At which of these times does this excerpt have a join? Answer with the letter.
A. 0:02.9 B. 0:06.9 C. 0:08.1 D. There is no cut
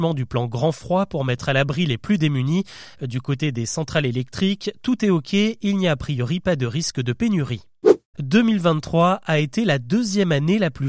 C